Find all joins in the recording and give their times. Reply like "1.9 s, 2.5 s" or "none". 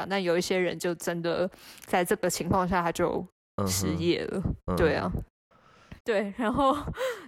6.0 s